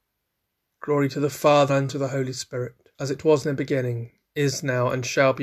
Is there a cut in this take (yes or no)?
yes